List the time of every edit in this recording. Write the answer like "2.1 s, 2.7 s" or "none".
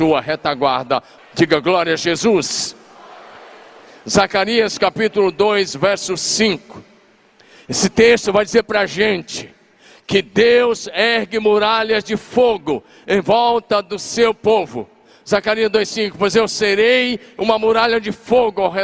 1.2 s